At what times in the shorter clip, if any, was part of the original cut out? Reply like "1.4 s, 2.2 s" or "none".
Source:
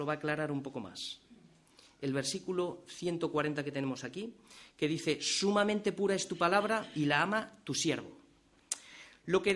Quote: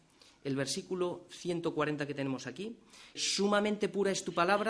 3.2 s

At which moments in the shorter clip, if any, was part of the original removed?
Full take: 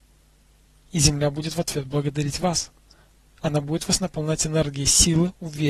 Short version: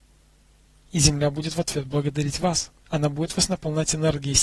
2.8 s

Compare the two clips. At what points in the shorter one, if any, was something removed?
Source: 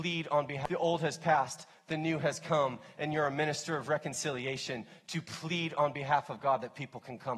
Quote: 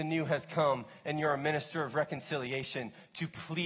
none

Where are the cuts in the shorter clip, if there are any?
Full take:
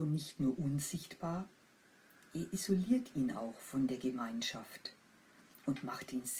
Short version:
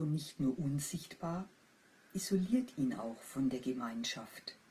2.1 s

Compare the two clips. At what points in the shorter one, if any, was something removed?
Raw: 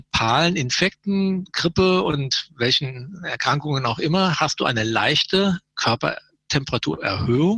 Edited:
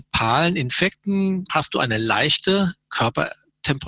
1.5 s

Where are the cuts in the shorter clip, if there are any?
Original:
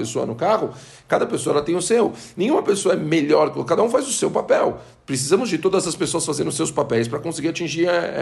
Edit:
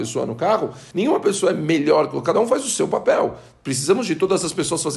0.9 s

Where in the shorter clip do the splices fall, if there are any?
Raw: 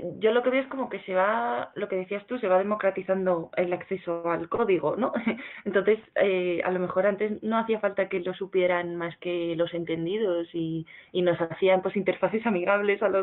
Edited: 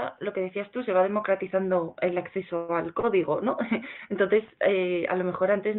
none

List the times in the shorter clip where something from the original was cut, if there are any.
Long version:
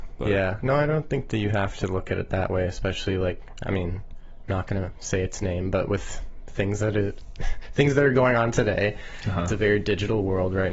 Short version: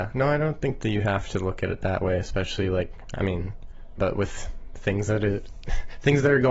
4.0 s

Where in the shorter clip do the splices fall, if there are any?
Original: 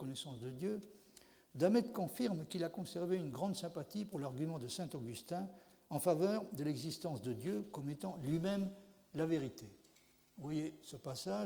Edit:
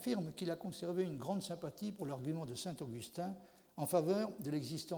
none

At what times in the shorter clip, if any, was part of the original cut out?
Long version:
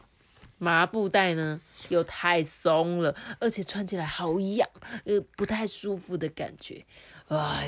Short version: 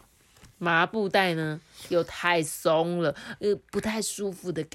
3.4 s

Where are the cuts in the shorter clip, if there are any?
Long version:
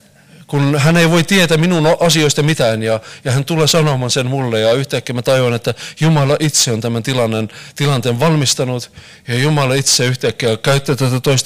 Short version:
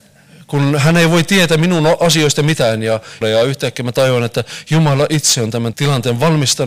3.2 s, 5.7 s

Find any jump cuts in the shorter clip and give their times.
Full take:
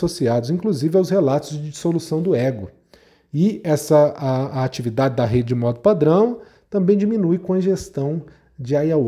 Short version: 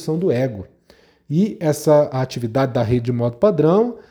2.1 s

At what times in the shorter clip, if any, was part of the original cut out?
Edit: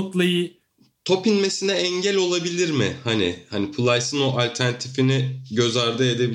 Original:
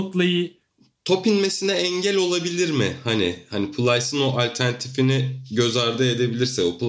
none

